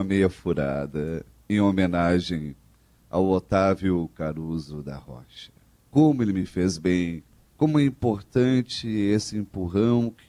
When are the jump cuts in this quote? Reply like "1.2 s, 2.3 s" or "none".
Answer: 5.8 s, 7.5 s